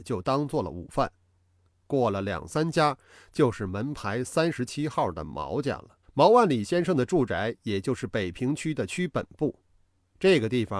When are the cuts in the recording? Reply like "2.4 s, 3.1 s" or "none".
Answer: 1.7 s, 6.0 s